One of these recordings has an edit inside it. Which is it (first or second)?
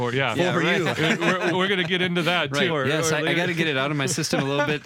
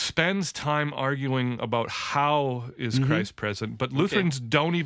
first